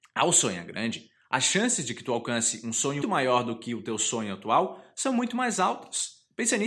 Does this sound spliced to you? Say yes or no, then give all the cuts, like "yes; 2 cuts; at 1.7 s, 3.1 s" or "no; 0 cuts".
yes; 1 cut; at 3.0 s